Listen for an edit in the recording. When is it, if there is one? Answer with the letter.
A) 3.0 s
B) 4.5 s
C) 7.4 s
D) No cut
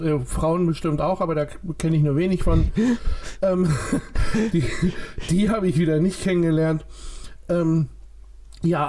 D